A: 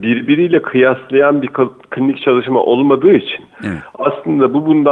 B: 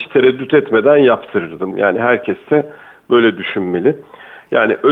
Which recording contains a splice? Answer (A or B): B